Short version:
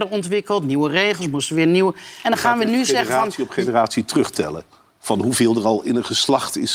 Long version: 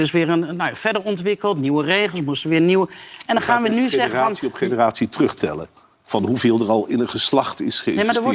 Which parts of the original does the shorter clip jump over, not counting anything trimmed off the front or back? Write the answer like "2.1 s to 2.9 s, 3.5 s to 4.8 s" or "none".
3.2 s to 3.3 s